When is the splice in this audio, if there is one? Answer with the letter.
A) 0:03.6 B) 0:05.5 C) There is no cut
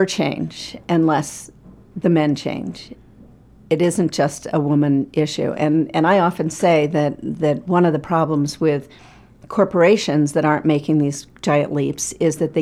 C